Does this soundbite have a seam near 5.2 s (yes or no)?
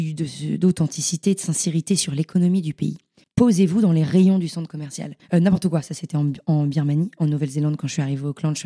yes